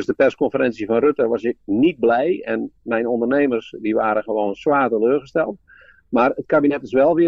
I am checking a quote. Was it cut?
no; 0 cuts

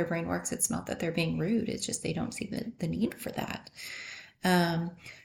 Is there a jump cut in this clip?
no; 0 cuts

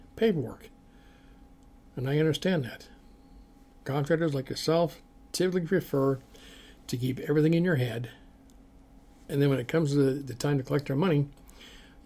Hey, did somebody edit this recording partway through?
no; 0 cuts

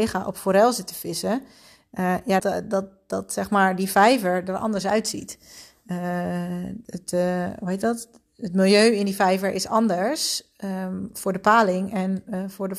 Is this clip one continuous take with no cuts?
no; 2 cuts; at 2.4 s, 6.8 s

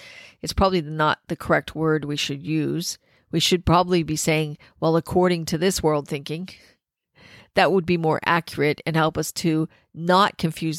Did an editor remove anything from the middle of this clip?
no; 0 cuts

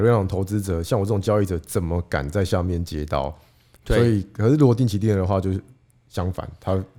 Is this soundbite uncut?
yes; 0 cuts

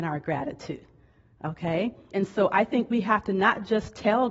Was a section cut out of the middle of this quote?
yes; 1 cut; at 2.1 s

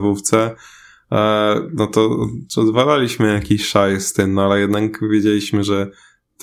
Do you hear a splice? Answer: no; 0 cuts

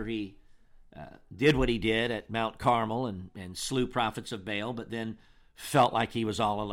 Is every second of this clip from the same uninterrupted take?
yes; 0 cuts

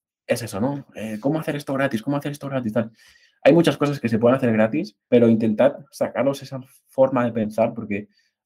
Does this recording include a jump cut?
yes; 1 cut; at 5.0 s

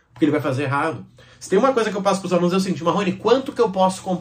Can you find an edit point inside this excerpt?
no; 0 cuts

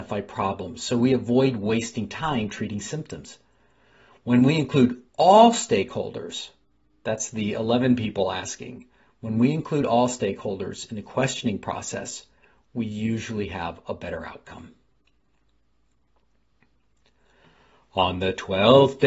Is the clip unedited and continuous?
yes; 0 cuts

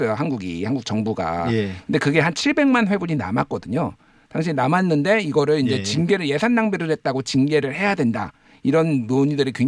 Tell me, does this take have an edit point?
no; 0 cuts

